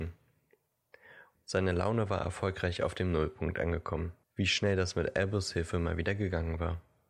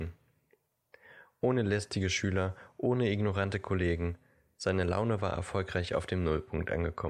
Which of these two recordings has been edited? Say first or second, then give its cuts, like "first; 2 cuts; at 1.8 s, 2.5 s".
first; 2 cuts; at 1.3 s, 4.2 s